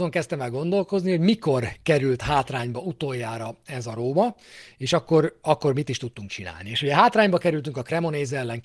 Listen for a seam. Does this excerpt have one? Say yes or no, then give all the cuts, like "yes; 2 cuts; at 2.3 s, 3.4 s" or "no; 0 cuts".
no; 0 cuts